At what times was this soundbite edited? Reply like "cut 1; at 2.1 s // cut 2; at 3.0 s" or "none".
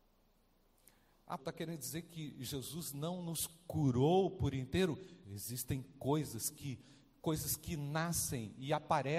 cut 1; at 1.4 s // cut 2; at 5.2 s